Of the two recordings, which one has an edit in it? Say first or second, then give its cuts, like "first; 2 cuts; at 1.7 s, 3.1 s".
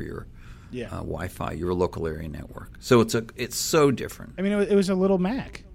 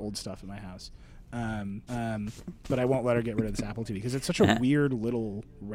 second; 1 cut; at 1.9 s